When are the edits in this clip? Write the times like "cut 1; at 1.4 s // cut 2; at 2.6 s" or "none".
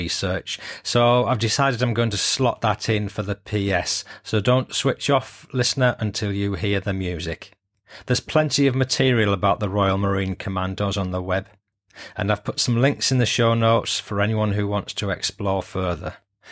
none